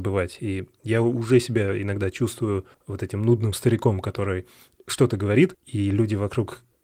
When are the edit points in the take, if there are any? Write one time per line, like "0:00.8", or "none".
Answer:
0:02.7